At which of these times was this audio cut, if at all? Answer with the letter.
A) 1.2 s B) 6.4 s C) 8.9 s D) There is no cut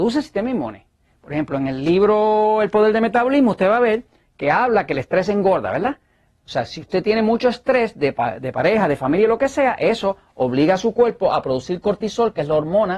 D